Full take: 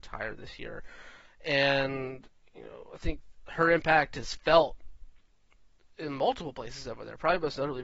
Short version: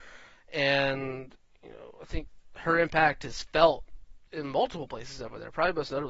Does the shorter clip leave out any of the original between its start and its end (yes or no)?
yes